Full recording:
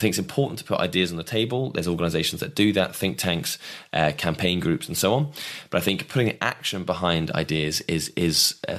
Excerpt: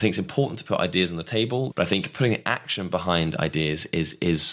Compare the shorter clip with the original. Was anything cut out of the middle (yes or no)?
yes